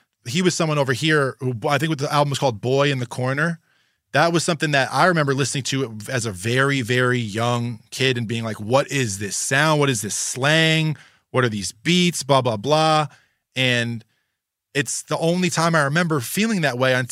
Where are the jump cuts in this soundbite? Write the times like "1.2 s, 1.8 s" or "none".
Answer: none